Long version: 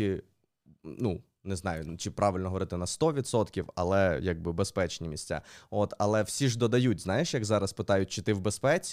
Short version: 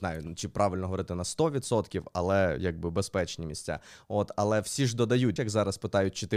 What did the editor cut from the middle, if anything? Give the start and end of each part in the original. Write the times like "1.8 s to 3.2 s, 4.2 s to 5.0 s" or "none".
7.0 s to 7.3 s